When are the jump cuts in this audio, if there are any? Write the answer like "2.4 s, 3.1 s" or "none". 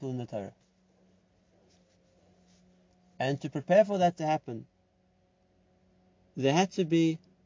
none